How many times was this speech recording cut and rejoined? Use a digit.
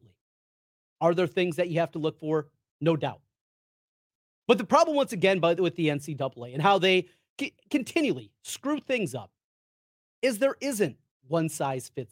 0